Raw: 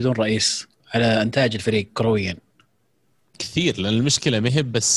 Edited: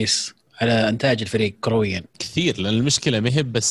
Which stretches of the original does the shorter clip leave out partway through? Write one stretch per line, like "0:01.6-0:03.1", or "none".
0:02.4-0:03.3